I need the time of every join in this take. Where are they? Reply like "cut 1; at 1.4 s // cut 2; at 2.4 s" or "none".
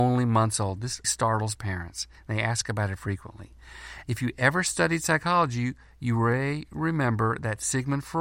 cut 1; at 1.0 s // cut 2; at 4.0 s